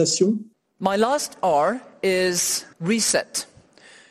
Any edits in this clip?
yes; 1 cut; at 2.7 s

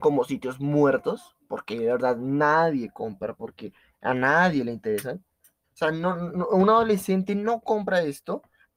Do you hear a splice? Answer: yes; 1 cut; at 5.6 s

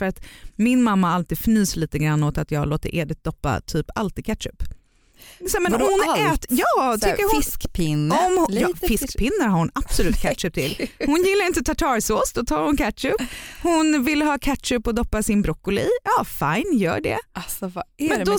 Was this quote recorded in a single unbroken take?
yes; 0 cuts

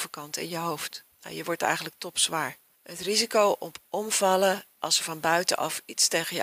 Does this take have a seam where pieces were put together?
yes; 1 cut; at 1.1 s

